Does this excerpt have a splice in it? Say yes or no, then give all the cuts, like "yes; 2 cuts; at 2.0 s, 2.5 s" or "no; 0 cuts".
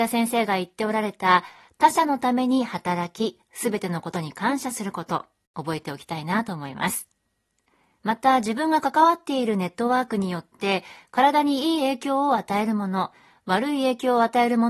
yes; 1 cut; at 8.0 s